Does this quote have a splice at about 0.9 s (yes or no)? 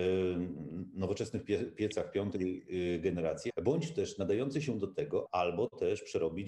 no